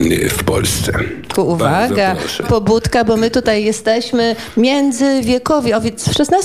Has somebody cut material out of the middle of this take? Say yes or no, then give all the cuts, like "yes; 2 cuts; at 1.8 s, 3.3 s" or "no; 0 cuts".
yes; 2 cuts; at 1.3 s, 2.4 s